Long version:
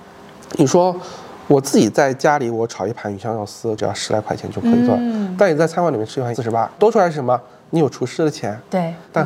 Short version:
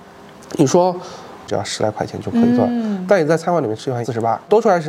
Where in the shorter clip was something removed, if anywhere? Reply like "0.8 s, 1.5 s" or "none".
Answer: 1.5 s